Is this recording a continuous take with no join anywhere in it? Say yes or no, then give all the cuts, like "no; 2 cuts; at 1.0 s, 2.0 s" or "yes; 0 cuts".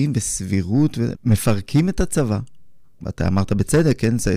no; 2 cuts; at 1.1 s, 3.0 s